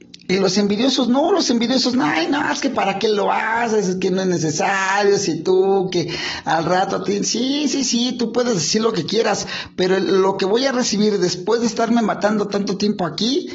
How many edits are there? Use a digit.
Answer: 0